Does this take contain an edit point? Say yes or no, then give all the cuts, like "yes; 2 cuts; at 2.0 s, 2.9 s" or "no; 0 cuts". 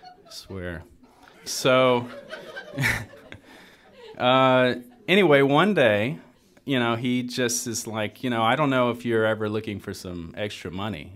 yes; 1 cut; at 1.3 s